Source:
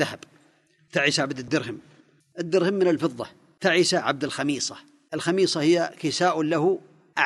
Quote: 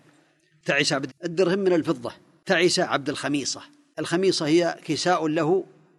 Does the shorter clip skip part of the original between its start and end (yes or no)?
yes